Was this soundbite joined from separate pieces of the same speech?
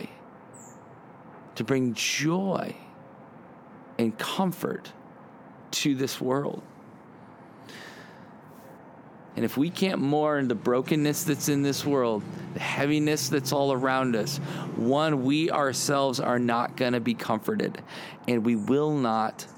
yes; 1 cut; at 9.3 s

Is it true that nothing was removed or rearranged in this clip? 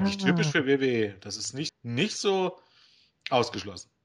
no; 1 cut; at 1.7 s

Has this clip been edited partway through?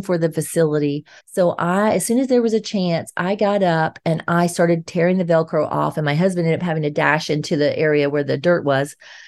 yes; 1 cut; at 1.2 s

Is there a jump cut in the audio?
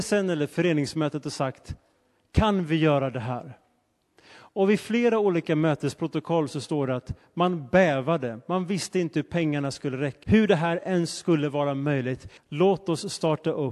yes; 2 cuts; at 10.2 s, 12.4 s

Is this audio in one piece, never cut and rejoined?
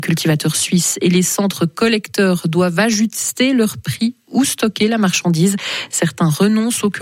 yes; 0 cuts

